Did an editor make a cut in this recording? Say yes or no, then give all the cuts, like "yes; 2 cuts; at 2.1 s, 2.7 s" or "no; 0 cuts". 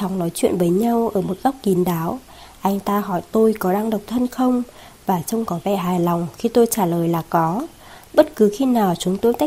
no; 0 cuts